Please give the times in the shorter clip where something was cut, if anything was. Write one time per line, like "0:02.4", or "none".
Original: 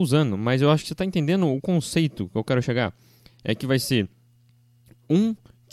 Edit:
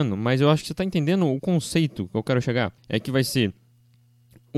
0:02.8